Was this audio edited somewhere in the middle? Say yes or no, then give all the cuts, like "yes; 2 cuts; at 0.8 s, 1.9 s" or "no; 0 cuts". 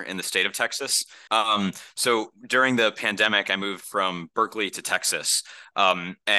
yes; 1 cut; at 1.3 s